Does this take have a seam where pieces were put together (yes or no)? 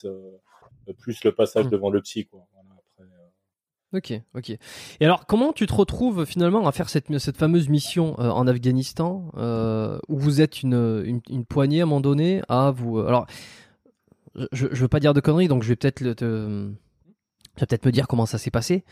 no